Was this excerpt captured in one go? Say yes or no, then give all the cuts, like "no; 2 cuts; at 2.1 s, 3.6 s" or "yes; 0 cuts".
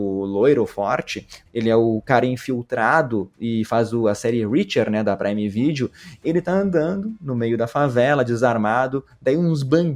no; 1 cut; at 1.4 s